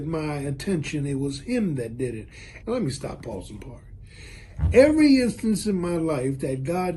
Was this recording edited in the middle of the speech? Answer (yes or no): yes